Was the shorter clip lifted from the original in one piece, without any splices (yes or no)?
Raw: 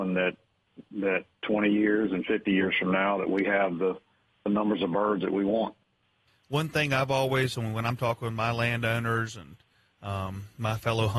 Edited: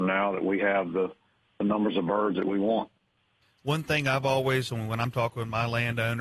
yes